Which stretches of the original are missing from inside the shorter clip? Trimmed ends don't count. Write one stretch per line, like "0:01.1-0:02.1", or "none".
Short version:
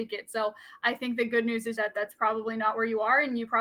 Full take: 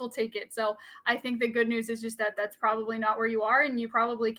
0:02.0-0:02.2

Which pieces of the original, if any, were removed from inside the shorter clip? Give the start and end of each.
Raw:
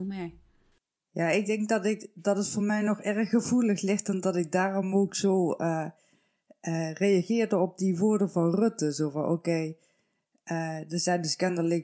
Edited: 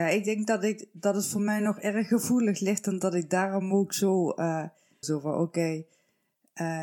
0:06.2-0:08.9

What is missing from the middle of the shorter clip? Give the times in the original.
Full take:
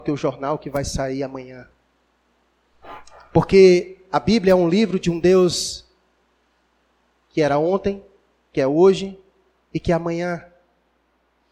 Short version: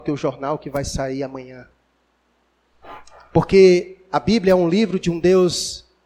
none

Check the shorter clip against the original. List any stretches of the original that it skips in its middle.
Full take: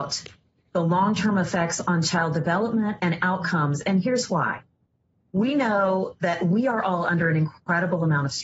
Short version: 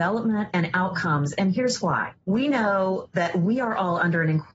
0:04.7-0:05.3

